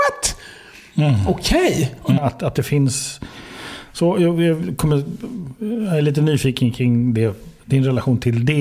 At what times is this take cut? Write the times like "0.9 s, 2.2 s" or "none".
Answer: 2.2 s